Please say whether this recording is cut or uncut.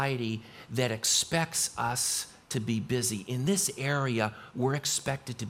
uncut